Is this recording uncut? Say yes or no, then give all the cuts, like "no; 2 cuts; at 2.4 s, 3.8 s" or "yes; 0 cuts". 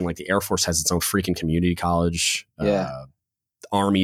yes; 0 cuts